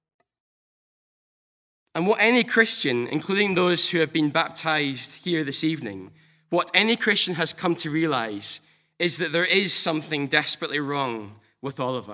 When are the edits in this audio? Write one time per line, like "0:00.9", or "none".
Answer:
none